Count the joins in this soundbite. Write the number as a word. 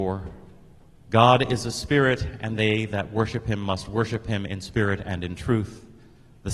zero